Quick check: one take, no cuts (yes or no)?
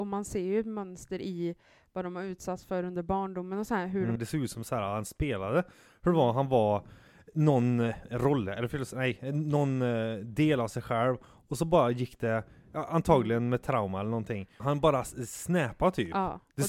no